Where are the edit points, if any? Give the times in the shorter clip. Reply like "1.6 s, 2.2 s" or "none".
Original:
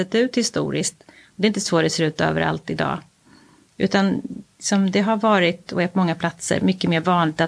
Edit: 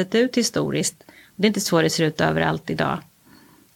none